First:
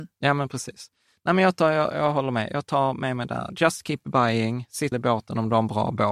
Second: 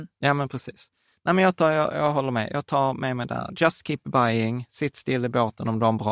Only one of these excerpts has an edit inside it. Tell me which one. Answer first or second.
first